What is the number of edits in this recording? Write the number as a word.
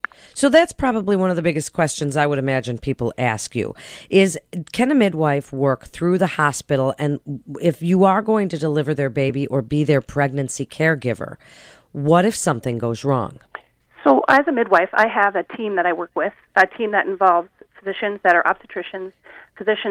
zero